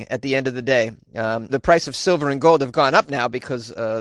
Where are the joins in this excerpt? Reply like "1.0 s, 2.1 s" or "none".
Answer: 1.5 s